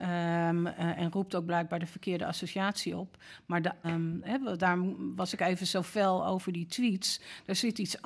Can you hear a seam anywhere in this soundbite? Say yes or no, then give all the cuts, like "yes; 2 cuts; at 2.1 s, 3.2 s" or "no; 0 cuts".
yes; 1 cut; at 3.8 s